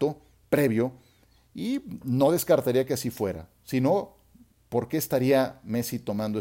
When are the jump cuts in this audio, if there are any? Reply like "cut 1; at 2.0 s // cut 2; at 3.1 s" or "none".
none

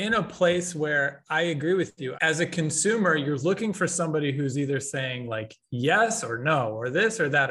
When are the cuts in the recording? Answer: cut 1; at 2.1 s

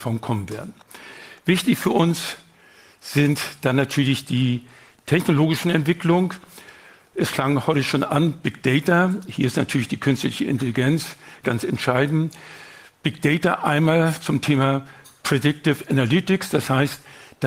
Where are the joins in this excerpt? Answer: cut 1; at 11.4 s

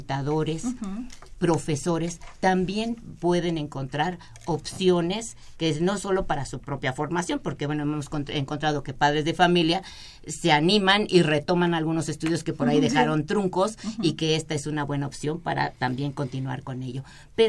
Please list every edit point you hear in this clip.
none

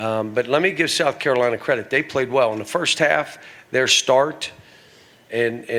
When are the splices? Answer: none

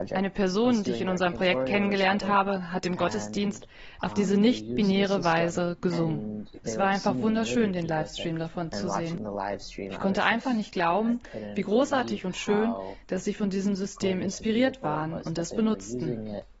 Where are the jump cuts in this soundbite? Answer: none

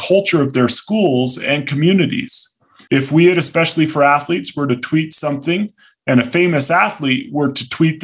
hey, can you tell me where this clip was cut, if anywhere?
cut 1; at 2.9 s

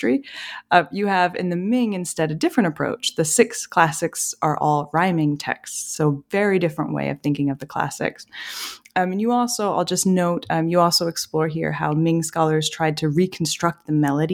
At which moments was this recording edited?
none

